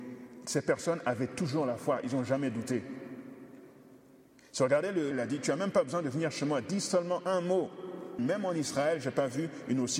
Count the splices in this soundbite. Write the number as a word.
two